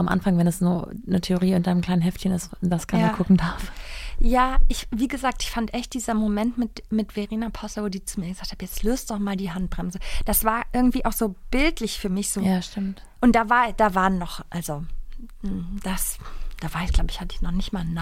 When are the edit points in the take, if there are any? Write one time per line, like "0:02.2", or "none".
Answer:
none